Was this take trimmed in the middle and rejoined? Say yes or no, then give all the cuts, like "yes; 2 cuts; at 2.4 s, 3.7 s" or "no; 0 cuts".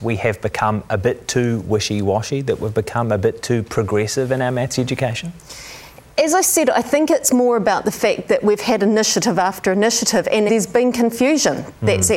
yes; 1 cut; at 10.5 s